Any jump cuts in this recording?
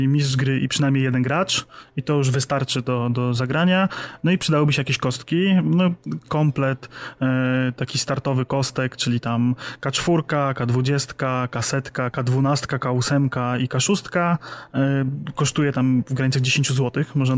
yes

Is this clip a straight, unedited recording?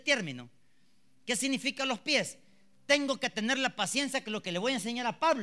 yes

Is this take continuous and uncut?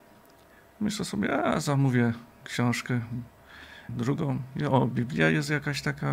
no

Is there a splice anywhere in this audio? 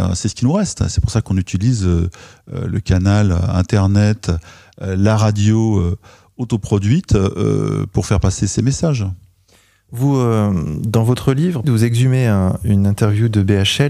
yes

